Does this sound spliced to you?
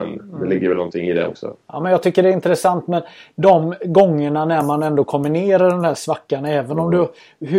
no; 0 cuts

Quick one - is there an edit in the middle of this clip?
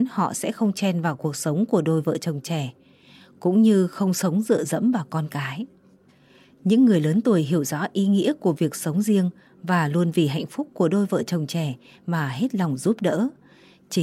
no; 0 cuts

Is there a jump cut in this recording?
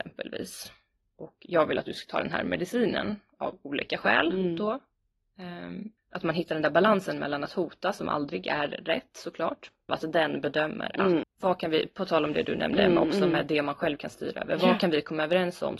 yes; 3 cuts; at 6.0 s, 9.9 s, 11.2 s

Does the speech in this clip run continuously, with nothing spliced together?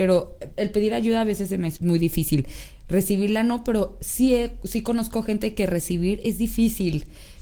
no; 1 cut; at 1.8 s

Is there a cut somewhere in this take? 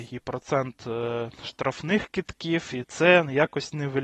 no; 0 cuts

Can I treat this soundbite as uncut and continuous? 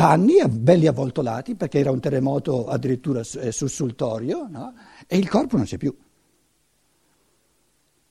yes; 0 cuts

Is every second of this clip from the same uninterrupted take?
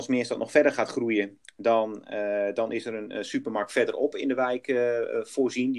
yes; 0 cuts

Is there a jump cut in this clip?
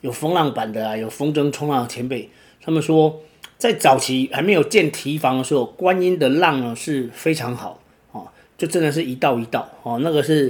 no; 0 cuts

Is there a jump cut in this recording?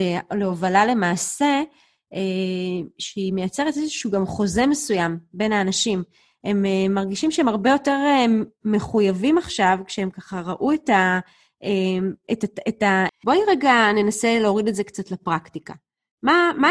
yes; 1 cut; at 13.1 s

